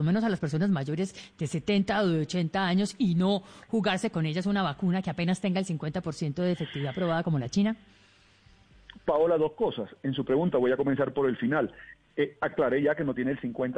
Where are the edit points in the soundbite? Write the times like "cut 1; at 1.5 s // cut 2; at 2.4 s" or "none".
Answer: none